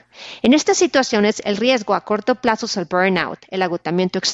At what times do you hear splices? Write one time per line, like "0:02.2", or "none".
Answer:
none